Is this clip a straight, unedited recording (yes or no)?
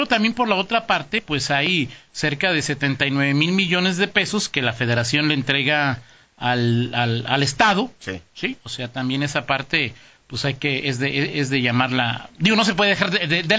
yes